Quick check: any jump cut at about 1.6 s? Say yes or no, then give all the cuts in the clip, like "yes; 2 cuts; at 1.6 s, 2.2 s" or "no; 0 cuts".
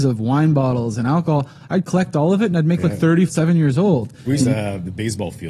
no; 2 cuts; at 3.3 s, 4.4 s